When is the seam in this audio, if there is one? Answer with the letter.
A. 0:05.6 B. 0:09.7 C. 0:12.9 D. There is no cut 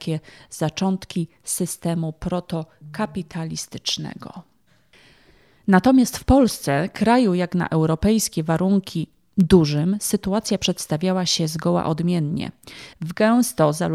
C